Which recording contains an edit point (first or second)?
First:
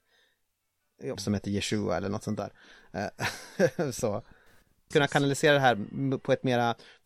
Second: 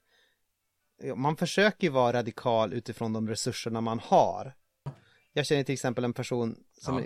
first